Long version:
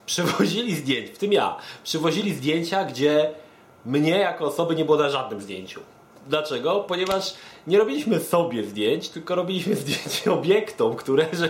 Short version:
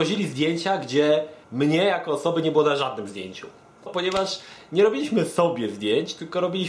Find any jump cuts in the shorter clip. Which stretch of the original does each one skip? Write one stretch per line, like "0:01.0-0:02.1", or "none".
0:03.5-0:03.8
0:06.2-0:06.8